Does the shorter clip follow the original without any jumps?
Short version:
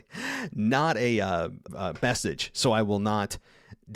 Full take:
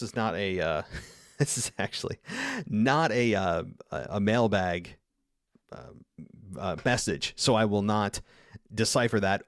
no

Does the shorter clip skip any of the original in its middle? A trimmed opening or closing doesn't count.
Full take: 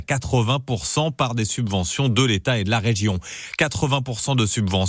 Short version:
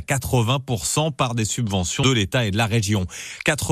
yes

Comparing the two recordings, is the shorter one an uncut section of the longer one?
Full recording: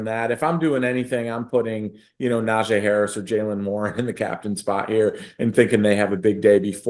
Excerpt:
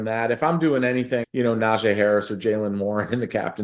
no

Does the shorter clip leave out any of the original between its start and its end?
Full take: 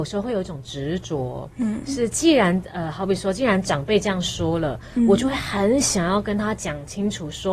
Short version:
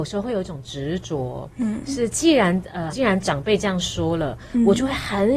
yes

